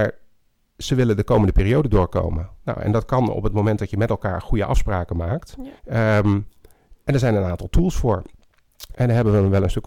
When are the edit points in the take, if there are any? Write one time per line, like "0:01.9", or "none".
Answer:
0:05.8
0:08.9

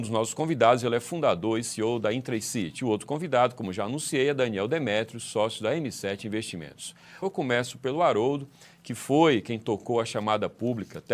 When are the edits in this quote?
0:07.2

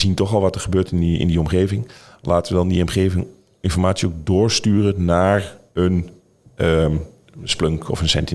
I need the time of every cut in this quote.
none

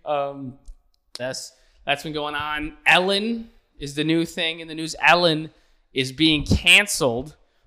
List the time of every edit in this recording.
0:01.2

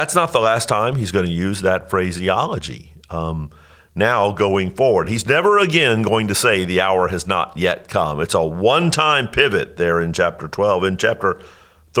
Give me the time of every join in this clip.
none

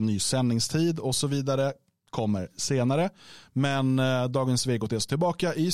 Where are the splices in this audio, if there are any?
none

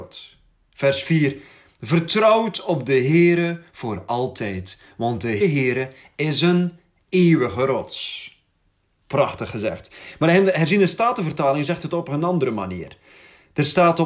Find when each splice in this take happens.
0:05.4

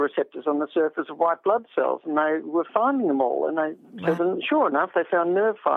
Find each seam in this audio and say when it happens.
0:04.2

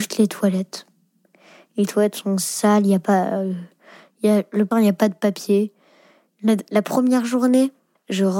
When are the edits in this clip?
0:04.7

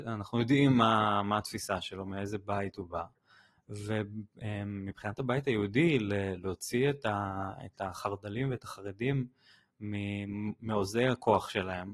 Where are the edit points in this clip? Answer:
none

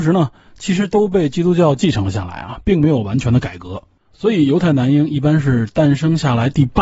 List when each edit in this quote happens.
0:04.0

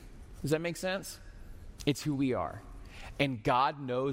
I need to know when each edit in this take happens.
0:01.8

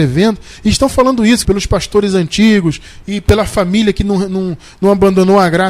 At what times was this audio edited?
0:01.4

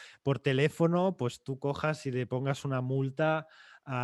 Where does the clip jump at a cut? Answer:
none

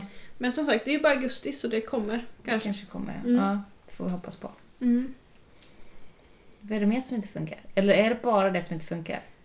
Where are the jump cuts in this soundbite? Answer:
none

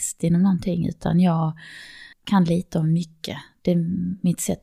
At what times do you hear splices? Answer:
0:02.1

